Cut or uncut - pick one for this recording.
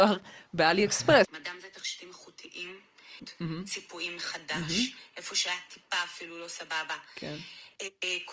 cut